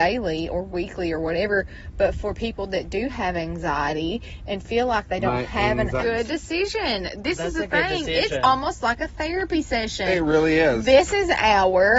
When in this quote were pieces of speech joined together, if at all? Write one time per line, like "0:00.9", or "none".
0:06.0